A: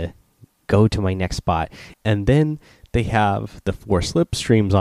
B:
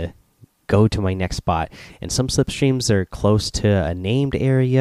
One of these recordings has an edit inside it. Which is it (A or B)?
A